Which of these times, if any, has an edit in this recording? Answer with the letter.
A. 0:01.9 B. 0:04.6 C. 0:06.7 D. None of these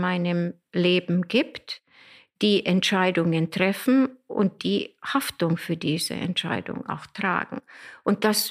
B